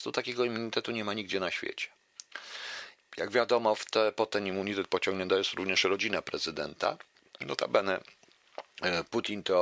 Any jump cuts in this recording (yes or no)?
yes